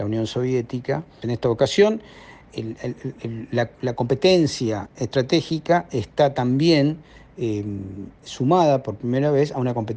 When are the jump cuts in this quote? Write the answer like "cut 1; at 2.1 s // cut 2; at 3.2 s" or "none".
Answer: cut 1; at 1.2 s // cut 2; at 2.5 s